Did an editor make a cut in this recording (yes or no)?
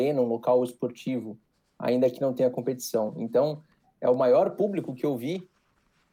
no